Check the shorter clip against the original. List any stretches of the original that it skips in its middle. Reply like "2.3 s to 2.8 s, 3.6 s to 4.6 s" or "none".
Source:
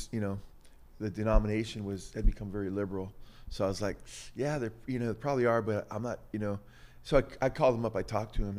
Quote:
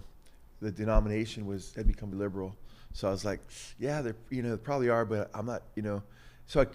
2.5 s to 2.7 s